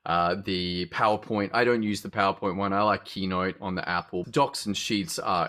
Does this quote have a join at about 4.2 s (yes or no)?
yes